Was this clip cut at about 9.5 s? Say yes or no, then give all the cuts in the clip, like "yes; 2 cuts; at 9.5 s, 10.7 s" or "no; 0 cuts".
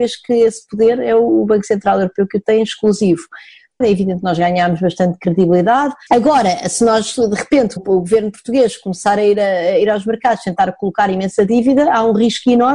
no; 3 cuts; at 3.8 s, 6.1 s, 7.8 s